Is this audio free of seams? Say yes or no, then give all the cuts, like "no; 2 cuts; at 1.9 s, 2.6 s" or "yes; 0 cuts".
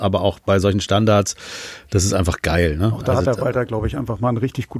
yes; 0 cuts